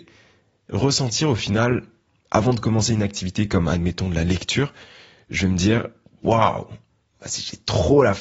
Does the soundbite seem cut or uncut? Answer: uncut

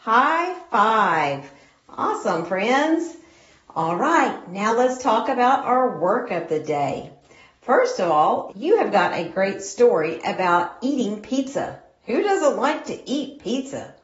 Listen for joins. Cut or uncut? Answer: cut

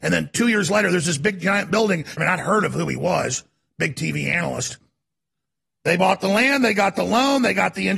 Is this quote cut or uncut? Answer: cut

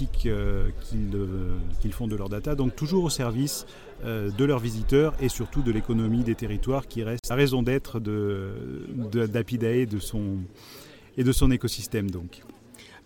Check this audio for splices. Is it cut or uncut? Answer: uncut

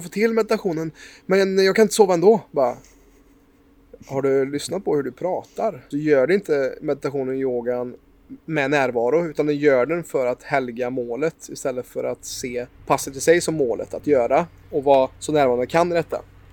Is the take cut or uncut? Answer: cut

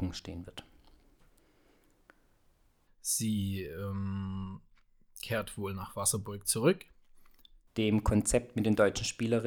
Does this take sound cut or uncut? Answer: cut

